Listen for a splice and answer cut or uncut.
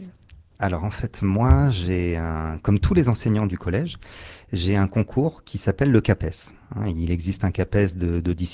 uncut